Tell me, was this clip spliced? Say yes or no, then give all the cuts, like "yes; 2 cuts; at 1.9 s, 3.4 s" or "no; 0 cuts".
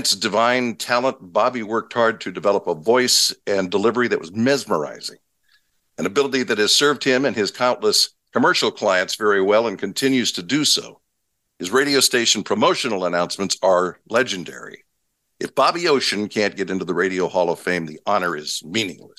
no; 0 cuts